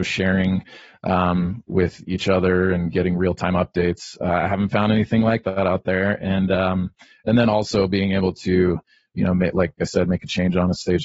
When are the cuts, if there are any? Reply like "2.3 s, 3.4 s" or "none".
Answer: none